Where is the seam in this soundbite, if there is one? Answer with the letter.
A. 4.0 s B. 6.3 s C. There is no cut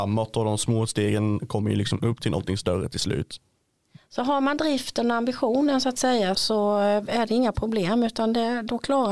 B